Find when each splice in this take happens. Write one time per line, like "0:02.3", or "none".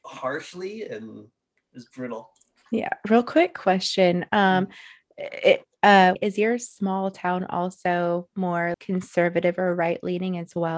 0:06.2
0:08.7